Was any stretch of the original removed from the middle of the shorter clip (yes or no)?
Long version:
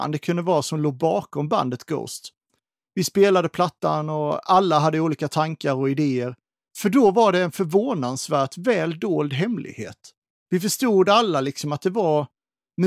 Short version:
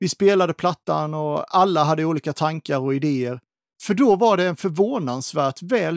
no